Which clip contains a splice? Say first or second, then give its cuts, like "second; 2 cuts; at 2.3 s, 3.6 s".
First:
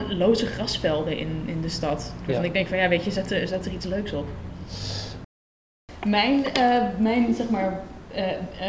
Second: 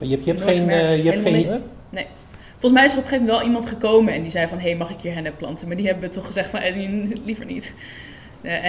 second; 1 cut; at 1.4 s